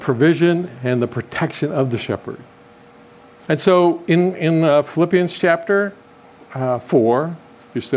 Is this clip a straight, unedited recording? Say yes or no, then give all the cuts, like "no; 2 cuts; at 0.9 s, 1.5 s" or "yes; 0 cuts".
yes; 0 cuts